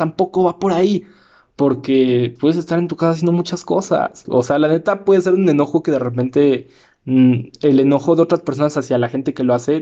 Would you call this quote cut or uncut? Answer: cut